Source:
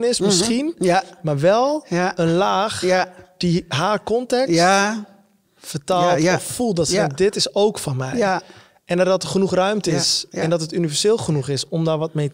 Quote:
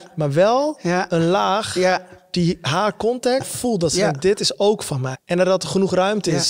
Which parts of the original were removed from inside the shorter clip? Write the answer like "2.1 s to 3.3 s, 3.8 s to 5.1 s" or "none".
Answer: 4.5 s to 6.4 s, 8.1 s to 8.7 s